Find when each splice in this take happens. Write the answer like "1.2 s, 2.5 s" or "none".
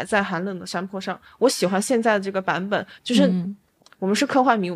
3.0 s

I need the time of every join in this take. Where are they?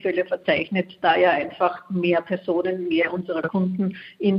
none

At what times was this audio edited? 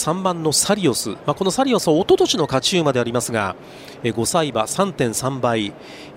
none

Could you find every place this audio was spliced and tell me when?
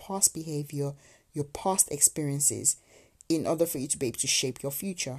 none

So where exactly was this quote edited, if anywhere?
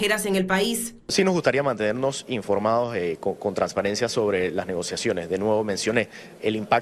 none

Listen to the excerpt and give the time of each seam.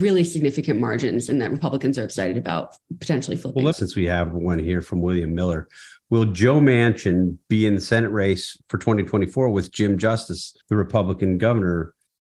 3.7 s, 10.6 s

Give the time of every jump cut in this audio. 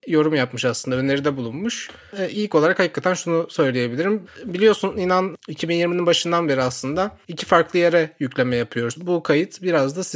4.3 s, 8.9 s

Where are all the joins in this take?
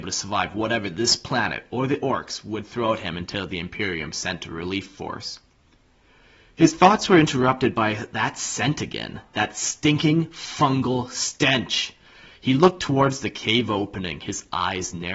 none

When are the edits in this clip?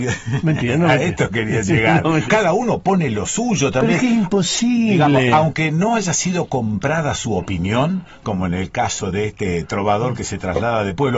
2.3 s

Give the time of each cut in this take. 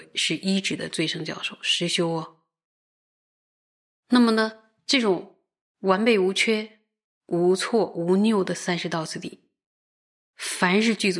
none

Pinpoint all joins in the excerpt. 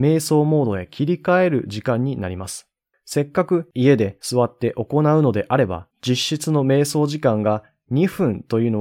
2.9 s, 5.9 s

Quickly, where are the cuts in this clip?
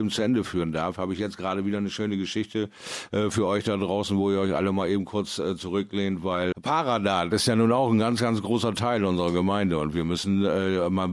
6.5 s

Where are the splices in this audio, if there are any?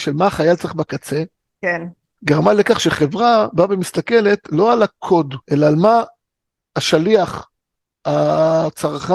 2.2 s, 5.4 s

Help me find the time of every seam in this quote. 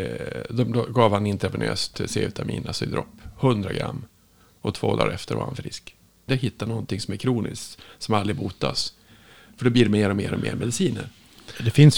6.3 s

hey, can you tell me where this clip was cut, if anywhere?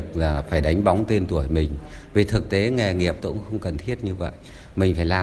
3.2 s

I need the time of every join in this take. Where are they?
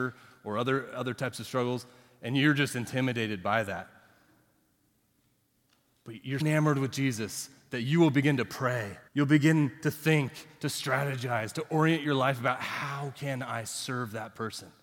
6.4 s, 9.1 s

